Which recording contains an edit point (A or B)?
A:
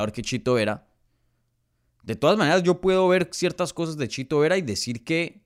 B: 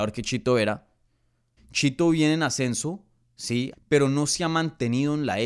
B